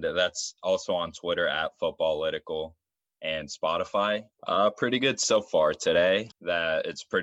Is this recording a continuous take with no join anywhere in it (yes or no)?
no